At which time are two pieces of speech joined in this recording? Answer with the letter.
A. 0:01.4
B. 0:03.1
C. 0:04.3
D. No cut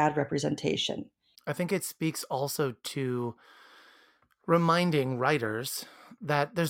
A